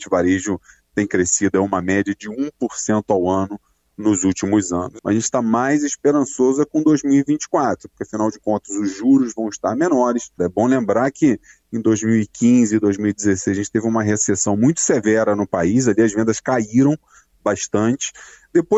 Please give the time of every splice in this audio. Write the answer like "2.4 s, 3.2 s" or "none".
5.0 s, 10.4 s